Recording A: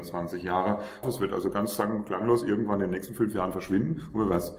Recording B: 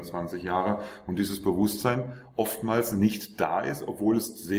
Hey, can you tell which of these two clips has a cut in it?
A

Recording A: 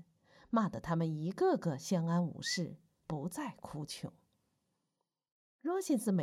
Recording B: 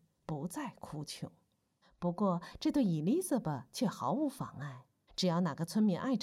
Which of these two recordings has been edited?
B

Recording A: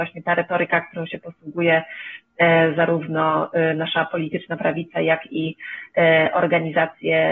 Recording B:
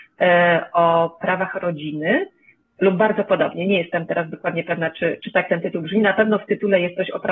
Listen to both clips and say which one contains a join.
B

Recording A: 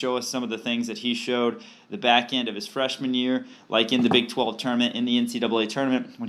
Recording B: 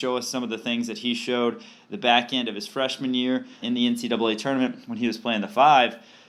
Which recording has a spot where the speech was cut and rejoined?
B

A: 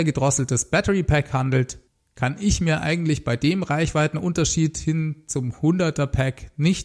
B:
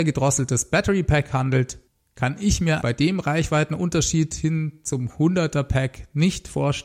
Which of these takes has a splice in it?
B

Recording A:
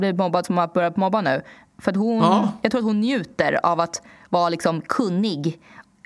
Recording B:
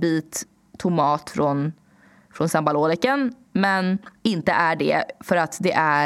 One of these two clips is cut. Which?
B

